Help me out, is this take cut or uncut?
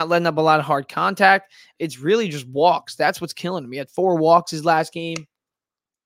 uncut